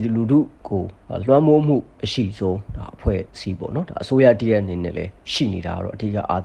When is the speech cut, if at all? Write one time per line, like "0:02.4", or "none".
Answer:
0:03.3